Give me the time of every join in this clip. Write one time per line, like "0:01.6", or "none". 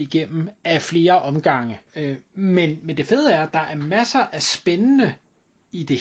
0:01.9